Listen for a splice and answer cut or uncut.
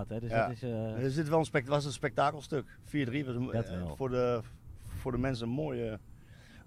uncut